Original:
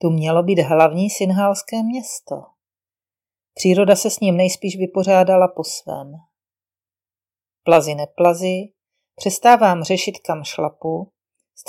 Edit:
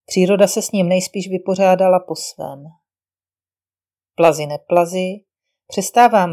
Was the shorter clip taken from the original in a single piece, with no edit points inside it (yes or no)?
yes